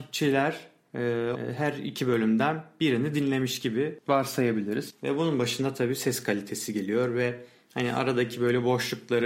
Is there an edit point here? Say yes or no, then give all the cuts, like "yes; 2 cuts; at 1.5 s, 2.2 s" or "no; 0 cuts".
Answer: yes; 2 cuts; at 1.3 s, 5.0 s